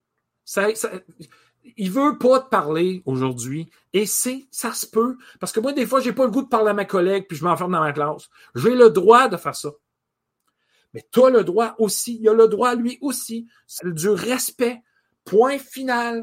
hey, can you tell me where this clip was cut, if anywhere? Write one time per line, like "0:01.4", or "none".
0:13.8